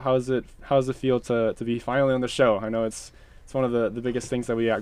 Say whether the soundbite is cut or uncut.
uncut